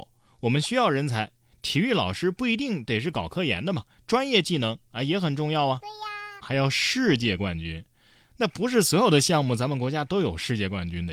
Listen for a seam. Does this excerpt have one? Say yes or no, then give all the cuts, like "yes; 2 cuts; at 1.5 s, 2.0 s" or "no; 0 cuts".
yes; 1 cut; at 6.4 s